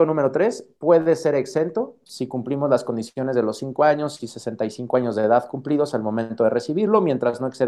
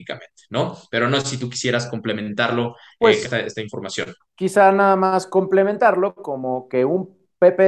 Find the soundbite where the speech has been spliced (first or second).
second